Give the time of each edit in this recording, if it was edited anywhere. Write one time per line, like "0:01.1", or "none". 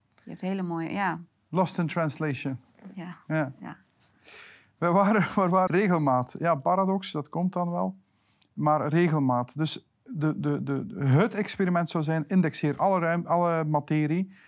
0:05.7